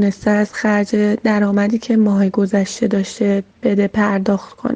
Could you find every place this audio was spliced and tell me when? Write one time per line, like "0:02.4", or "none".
0:03.5

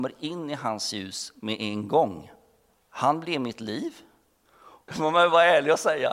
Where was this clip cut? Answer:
0:02.7
0:04.9

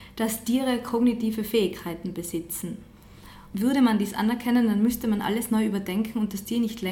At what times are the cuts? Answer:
0:03.5

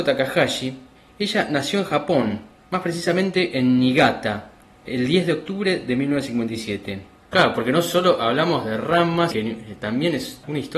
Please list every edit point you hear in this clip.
0:07.3
0:09.3

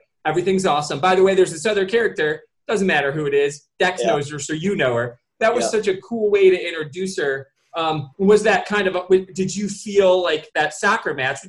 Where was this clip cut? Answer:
none

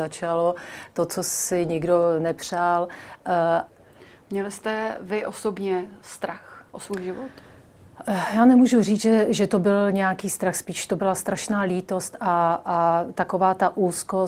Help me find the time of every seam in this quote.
0:03.7

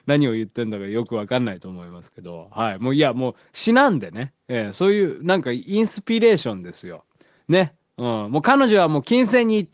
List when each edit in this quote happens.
none

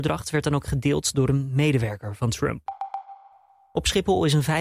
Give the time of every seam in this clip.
none

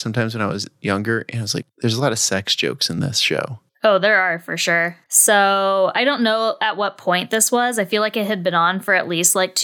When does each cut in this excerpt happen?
0:01.6
0:05.1

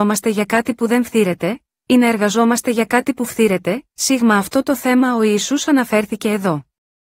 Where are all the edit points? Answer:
0:01.8

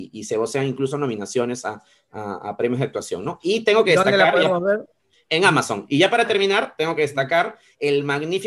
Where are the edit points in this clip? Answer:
none

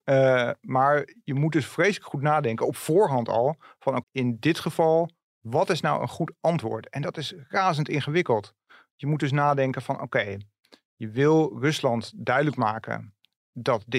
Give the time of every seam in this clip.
0:04.0

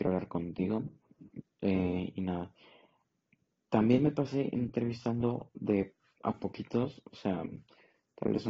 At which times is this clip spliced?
0:01.4

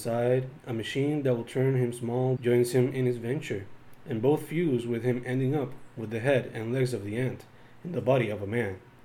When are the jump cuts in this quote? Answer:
0:02.4

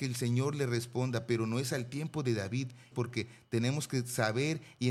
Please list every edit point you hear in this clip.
0:02.9

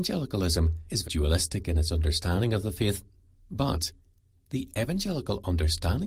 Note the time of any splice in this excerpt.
0:01.0
0:03.3

